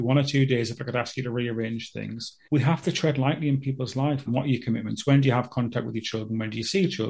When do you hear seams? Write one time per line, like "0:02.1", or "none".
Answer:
0:02.4
0:04.3